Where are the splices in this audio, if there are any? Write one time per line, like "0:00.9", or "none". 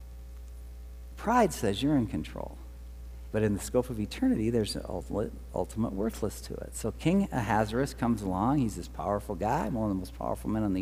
0:03.3